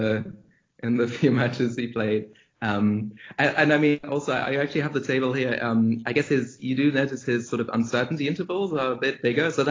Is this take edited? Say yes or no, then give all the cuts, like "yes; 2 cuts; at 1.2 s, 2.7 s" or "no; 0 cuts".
no; 0 cuts